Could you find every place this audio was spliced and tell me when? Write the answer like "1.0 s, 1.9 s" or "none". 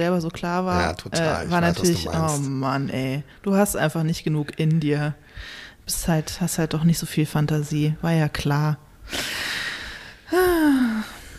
none